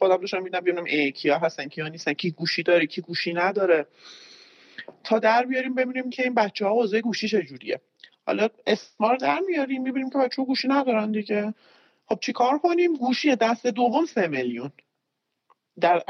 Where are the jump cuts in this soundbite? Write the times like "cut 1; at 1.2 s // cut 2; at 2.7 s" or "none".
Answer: none